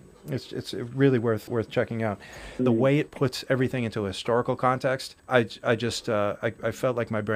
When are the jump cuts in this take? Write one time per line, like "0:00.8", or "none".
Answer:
0:01.5
0:02.6
0:05.2